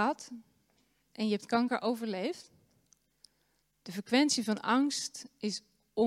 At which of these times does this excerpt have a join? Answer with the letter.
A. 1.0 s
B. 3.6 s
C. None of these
B